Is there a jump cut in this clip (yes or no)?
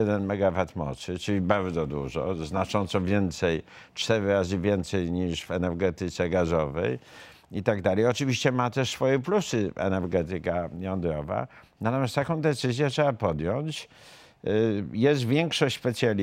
no